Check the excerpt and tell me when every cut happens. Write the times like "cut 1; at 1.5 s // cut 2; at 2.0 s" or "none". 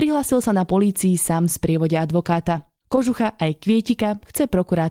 cut 1; at 2.8 s